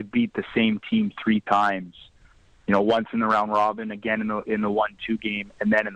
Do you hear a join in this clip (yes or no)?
no